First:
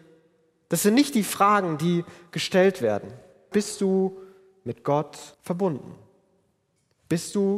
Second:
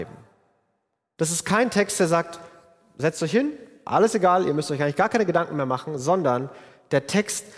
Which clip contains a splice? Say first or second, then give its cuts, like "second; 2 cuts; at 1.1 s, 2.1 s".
first; 2 cuts; at 3.5 s, 5.3 s